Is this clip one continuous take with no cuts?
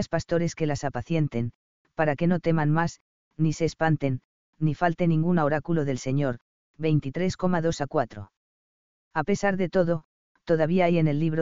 yes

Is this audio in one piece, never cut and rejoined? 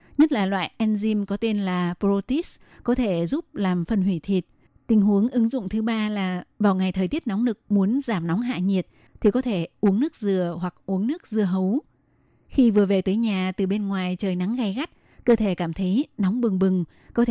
no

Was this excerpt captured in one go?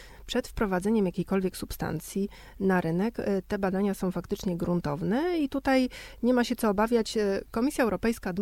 yes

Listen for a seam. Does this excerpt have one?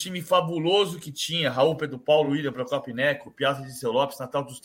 no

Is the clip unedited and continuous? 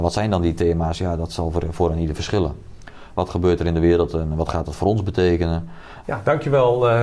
no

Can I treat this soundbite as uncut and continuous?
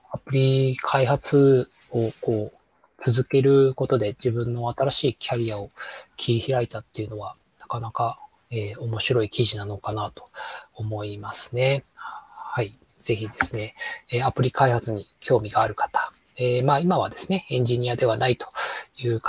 yes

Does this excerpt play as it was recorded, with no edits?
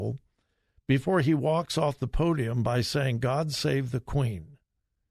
yes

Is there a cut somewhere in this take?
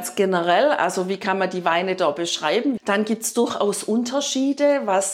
yes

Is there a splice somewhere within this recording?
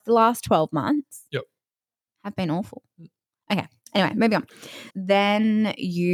yes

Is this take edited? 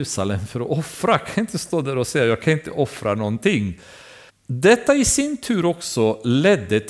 yes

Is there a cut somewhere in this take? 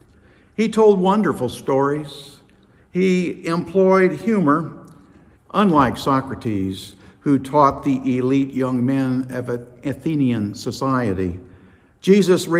yes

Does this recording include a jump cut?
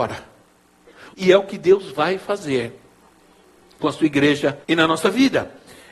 yes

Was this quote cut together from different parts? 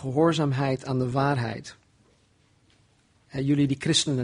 no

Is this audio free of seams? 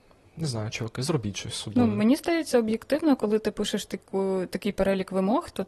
yes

